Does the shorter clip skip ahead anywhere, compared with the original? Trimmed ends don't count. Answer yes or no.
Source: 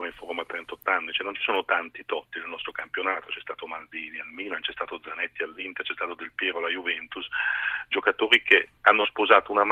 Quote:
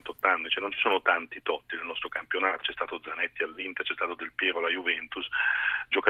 yes